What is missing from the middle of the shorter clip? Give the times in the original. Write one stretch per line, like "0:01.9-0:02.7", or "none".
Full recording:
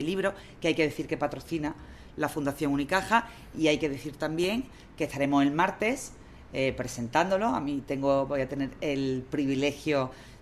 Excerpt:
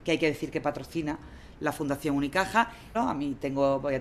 0:03.5-0:07.4